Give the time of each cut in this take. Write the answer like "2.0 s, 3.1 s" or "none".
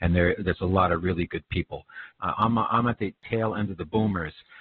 2.1 s